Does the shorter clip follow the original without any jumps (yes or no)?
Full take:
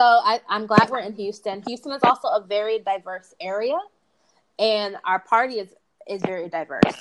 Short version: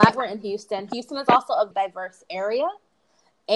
no